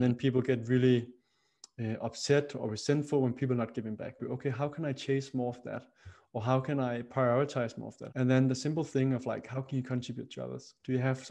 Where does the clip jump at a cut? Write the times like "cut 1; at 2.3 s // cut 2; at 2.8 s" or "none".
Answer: cut 1; at 4.2 s // cut 2; at 8.1 s